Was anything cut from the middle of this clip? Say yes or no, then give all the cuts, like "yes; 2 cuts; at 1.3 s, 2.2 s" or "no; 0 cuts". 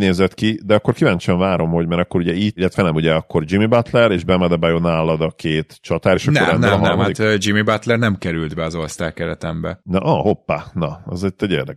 no; 0 cuts